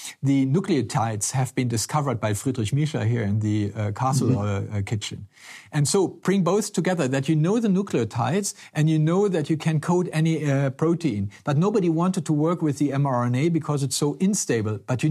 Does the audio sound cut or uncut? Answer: uncut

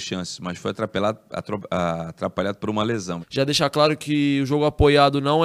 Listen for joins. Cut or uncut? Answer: cut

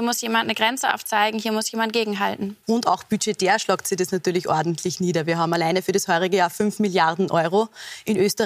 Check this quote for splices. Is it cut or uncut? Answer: cut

